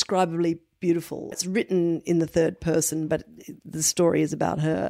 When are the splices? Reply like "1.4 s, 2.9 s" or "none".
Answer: 1.3 s